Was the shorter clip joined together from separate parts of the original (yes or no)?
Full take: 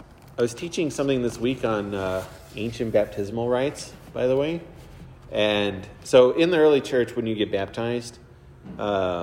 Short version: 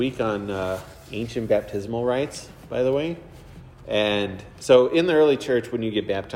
no